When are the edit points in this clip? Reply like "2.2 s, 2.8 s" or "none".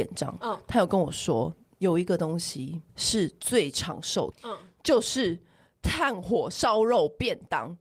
2.9 s, 4.3 s